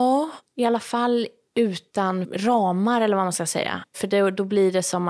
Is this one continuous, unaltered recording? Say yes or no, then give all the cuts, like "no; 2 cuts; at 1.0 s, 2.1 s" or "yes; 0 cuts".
yes; 0 cuts